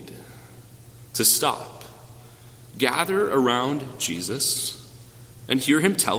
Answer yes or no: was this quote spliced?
no